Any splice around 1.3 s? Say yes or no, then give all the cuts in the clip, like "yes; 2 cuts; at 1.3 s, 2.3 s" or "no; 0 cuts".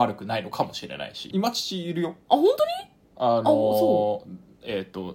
yes; 1 cut; at 1.3 s